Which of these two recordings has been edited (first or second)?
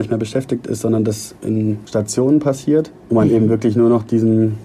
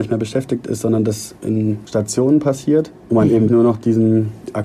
second